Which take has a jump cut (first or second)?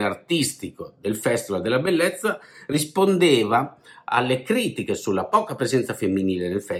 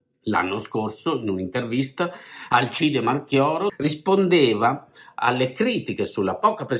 second